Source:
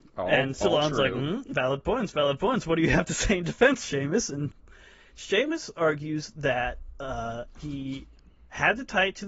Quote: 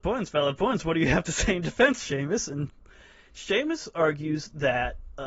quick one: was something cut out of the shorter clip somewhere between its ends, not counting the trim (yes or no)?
no